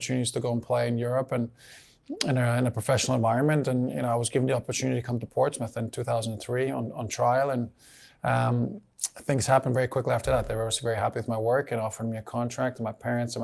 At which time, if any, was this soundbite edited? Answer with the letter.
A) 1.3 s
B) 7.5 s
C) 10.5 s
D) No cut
D